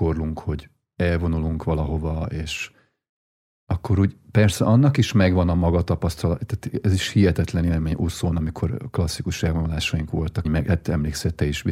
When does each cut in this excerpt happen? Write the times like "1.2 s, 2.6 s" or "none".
10.4 s